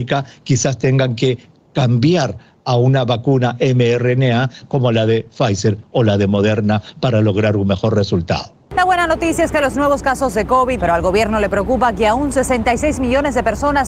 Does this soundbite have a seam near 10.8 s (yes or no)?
yes